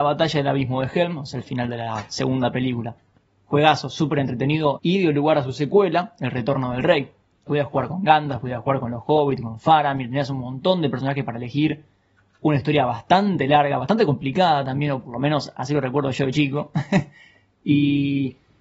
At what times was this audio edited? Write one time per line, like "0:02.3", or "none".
0:04.8
0:07.5